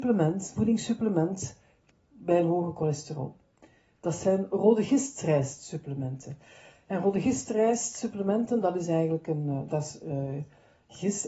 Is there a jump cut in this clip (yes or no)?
no